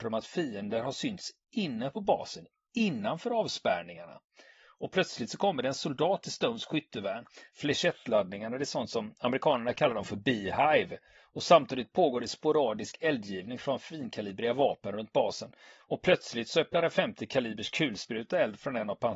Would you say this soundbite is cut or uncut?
cut